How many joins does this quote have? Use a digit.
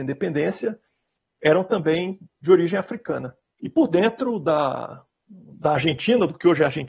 1